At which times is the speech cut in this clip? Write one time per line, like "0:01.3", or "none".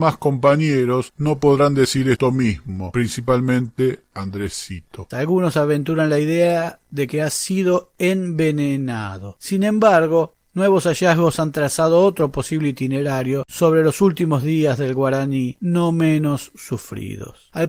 0:05.1